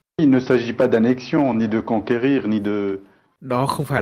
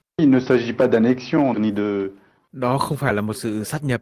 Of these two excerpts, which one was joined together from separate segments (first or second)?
second